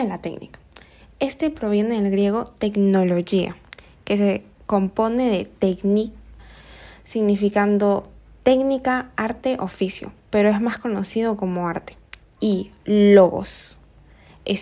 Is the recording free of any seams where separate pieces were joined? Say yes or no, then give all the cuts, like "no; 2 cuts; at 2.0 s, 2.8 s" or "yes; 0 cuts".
yes; 0 cuts